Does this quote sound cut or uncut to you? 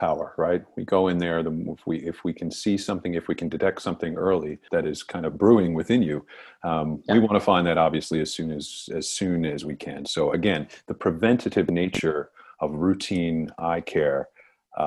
cut